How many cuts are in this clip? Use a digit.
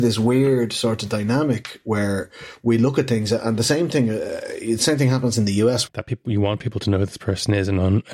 1